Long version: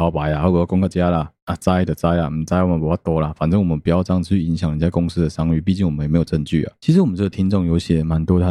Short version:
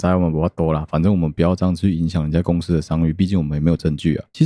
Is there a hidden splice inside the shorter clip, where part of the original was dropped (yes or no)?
no